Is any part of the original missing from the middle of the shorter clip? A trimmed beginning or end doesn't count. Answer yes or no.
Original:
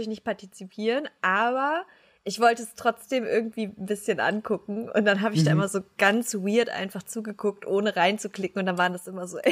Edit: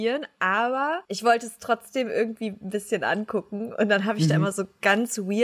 yes